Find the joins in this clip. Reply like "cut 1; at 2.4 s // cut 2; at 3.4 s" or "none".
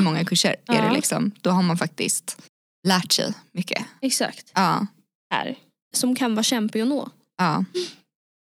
cut 1; at 4.5 s // cut 2; at 5.9 s